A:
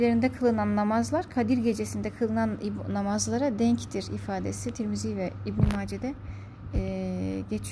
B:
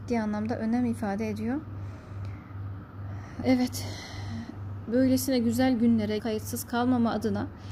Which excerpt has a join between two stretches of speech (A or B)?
B